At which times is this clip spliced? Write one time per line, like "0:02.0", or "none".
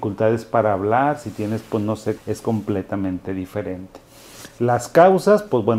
0:02.2